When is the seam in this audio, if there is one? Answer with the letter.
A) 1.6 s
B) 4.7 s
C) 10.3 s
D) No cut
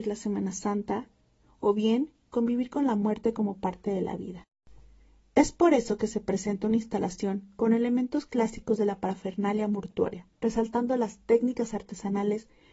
C